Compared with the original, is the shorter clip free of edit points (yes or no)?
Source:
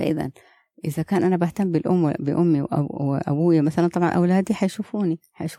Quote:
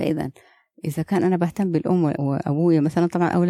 no